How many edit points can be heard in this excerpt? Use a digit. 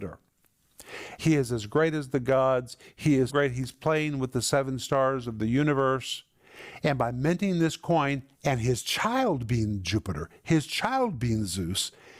3